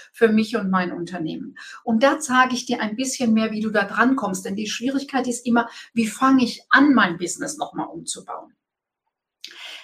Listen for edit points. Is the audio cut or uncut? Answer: uncut